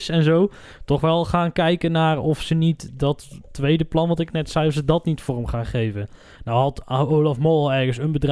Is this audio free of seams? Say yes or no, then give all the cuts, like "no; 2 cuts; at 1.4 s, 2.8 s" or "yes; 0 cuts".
yes; 0 cuts